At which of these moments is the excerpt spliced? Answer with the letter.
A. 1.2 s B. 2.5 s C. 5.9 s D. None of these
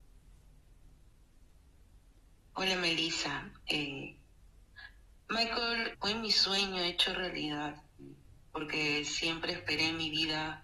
C